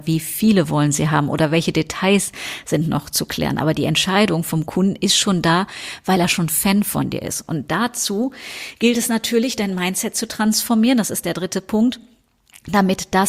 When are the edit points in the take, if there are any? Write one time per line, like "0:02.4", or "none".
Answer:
none

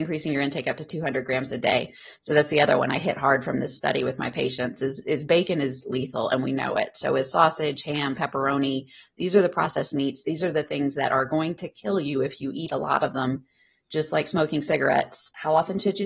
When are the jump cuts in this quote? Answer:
none

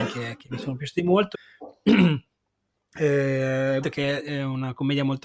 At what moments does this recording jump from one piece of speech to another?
0:01.3
0:03.8

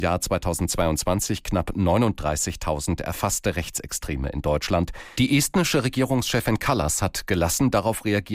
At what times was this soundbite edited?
0:05.2

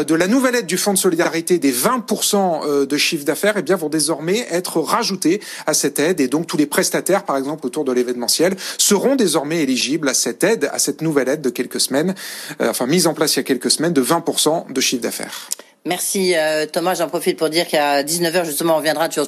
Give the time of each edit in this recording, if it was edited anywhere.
none

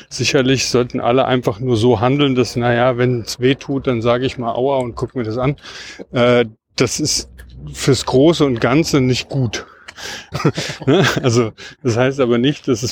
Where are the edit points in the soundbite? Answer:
0:10.3

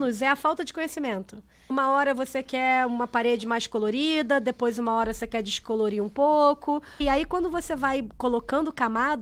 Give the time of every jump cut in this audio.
0:01.7
0:07.0

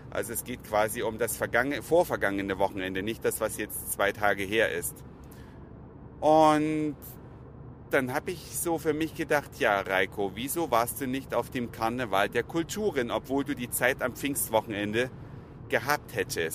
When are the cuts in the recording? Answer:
none

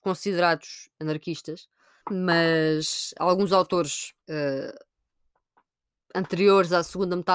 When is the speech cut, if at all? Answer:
0:02.0
0:04.2

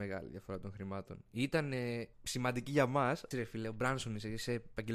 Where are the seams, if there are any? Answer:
0:02.1
0:03.3

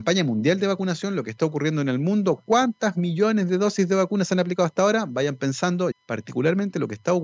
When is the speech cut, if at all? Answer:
0:05.9

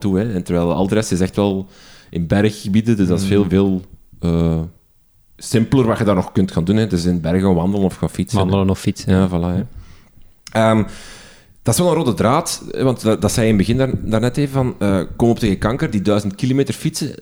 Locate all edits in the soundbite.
none

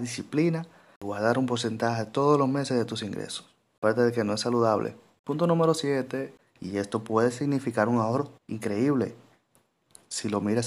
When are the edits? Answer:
0:06.4
0:08.4

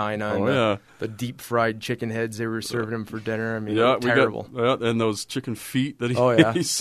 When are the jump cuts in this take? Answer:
none

